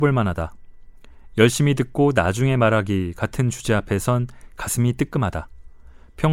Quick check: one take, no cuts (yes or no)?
yes